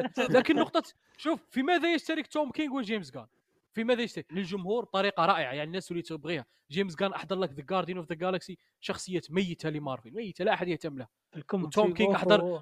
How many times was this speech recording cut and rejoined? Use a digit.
1